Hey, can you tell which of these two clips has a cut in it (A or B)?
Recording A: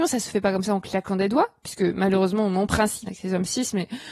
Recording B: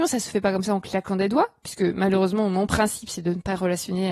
A